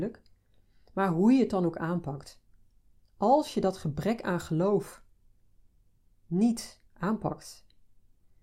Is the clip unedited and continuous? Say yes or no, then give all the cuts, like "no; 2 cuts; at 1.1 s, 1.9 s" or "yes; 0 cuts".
no; 1 cut; at 6.9 s